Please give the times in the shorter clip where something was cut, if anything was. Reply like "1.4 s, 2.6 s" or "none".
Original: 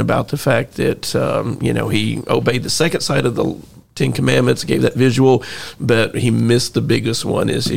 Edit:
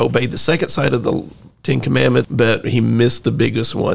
2.2 s